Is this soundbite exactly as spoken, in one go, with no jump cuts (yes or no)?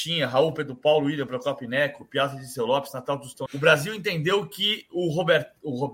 no